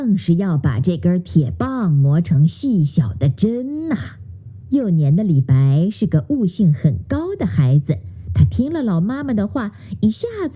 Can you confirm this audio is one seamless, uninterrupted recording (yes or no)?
no